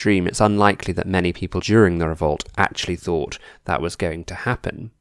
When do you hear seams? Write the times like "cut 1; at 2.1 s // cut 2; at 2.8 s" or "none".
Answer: cut 1; at 1.6 s